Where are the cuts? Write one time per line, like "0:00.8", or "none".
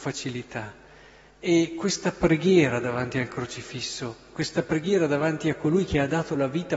none